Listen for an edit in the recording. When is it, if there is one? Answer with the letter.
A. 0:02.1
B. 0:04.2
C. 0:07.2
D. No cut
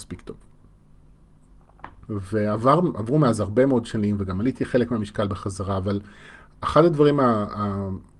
A